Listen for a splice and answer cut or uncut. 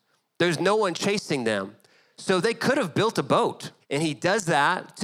cut